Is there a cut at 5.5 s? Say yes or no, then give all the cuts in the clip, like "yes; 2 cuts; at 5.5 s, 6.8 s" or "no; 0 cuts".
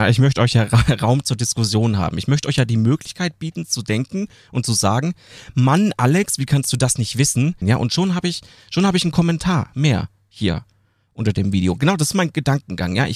no; 1 cut; at 7.6 s